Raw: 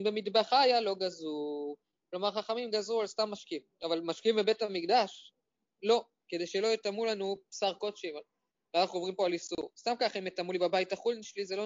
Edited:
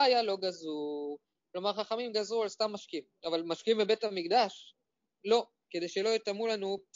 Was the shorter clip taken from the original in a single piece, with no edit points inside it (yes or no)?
yes